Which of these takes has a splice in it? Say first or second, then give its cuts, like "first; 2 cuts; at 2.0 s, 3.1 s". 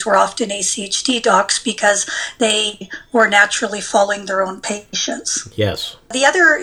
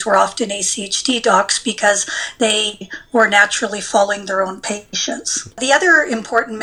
second; 1 cut; at 5.5 s